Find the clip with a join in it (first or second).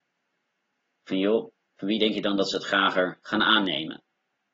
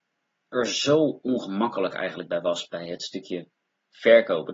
first